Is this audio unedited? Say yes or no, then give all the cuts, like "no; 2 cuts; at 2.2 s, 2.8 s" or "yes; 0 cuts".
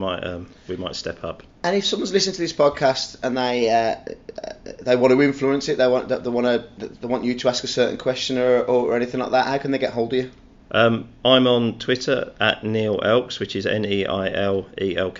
yes; 0 cuts